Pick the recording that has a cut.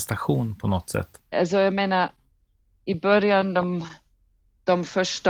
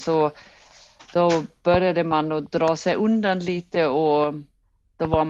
first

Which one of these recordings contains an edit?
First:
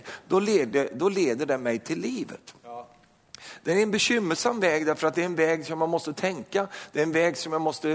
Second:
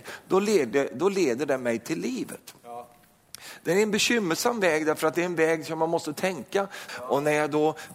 second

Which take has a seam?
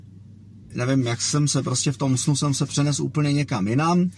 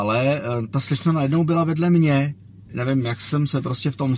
second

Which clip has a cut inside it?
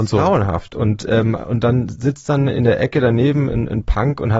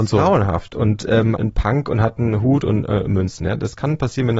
second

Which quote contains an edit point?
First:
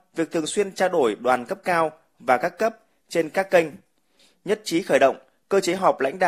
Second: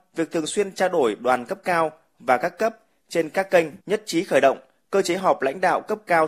second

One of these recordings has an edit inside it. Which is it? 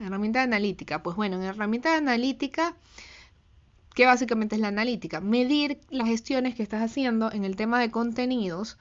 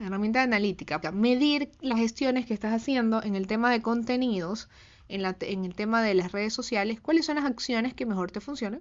second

